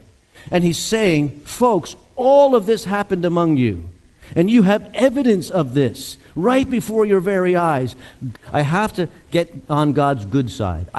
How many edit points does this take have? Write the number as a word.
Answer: one